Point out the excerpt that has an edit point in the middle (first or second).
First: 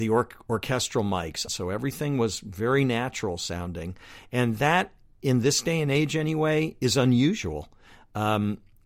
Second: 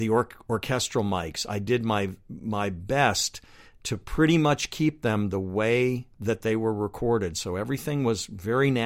first